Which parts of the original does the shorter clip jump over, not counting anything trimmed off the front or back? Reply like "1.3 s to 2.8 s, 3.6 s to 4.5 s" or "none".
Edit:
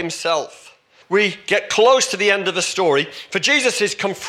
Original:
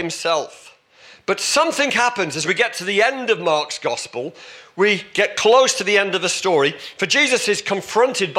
1.0 s to 4.7 s